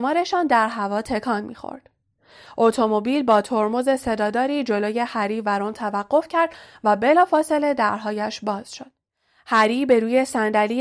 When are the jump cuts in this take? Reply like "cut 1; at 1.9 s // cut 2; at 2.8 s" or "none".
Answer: none